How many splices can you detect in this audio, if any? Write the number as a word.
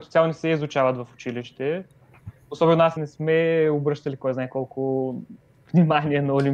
one